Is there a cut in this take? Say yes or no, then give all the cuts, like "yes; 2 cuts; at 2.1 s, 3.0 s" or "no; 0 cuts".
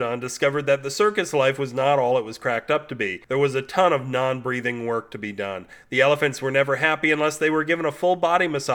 no; 0 cuts